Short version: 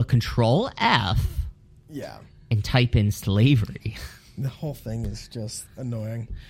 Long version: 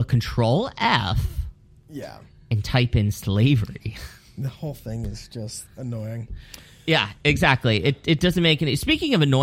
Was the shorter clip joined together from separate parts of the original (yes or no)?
no